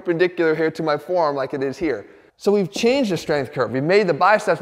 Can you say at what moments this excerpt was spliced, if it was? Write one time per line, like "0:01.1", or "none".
0:02.3